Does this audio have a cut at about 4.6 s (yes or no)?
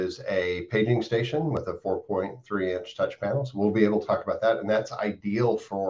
no